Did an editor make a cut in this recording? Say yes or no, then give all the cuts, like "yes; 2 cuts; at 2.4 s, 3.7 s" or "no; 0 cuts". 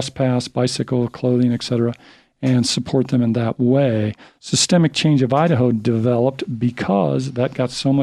no; 0 cuts